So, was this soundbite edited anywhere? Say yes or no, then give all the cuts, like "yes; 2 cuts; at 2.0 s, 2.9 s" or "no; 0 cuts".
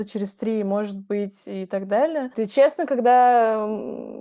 yes; 1 cut; at 2.3 s